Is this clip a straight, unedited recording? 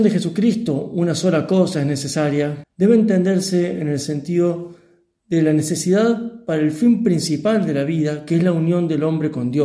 no; 1 cut; at 2.6 s

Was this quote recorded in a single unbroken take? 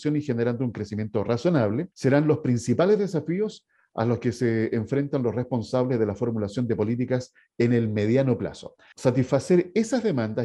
no; 2 cuts; at 1.9 s, 8.9 s

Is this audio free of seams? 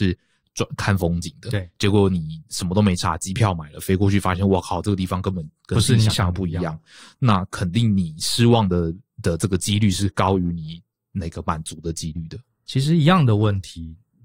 yes; 0 cuts

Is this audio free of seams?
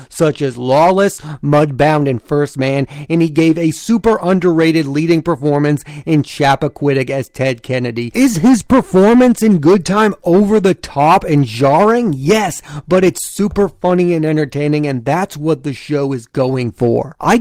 yes; 0 cuts

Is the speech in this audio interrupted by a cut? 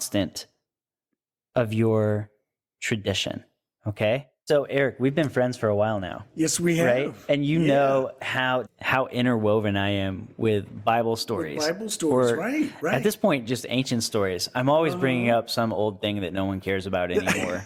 yes; 1 cut; at 8.7 s

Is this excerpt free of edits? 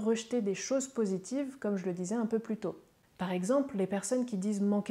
yes; 0 cuts

